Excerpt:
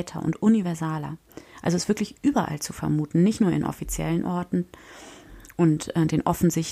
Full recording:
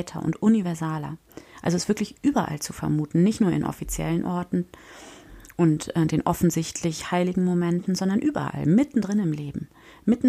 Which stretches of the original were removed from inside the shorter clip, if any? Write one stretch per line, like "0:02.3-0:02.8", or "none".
none